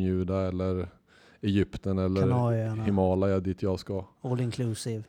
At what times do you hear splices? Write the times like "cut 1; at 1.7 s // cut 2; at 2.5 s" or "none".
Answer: none